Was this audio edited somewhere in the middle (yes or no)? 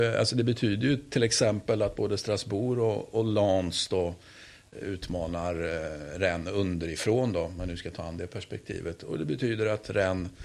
no